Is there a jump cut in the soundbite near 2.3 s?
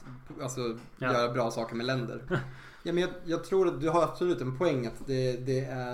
yes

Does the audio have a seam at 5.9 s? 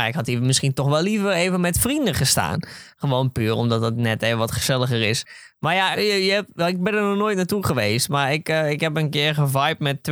yes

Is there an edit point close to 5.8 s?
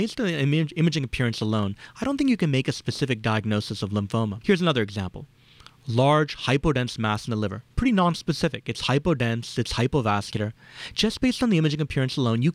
no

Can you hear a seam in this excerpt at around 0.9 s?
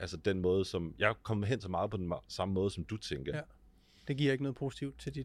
no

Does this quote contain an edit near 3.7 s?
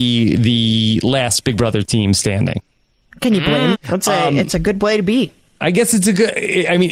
yes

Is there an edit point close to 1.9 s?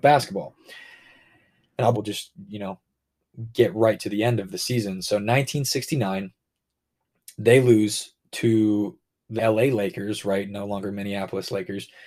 yes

